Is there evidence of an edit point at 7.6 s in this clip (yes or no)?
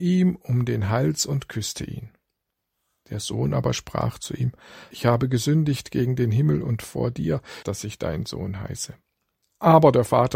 yes